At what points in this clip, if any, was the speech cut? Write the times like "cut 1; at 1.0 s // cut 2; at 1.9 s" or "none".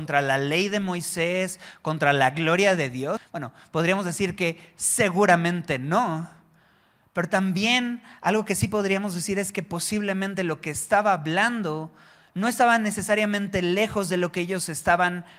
cut 1; at 3.2 s